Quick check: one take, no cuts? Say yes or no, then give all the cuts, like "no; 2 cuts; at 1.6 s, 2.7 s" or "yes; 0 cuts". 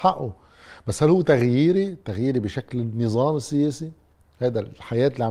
yes; 0 cuts